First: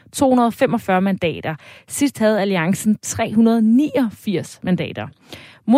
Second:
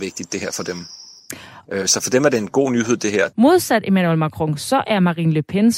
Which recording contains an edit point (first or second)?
second